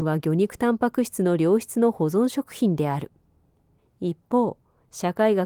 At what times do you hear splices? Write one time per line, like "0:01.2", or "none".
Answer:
0:03.8